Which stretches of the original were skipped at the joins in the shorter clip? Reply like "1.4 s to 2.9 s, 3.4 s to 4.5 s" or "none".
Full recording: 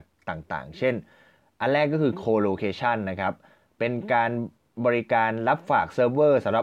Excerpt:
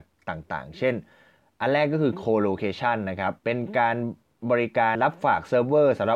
3.4 s to 3.7 s, 5.3 s to 5.4 s

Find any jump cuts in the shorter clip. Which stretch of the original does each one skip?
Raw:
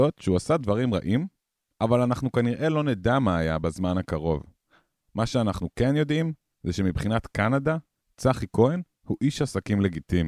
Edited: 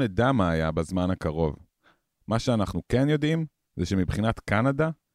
none

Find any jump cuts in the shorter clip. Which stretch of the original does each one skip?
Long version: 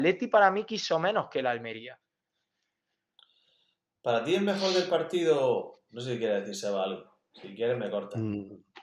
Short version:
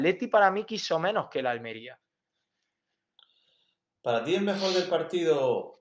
none

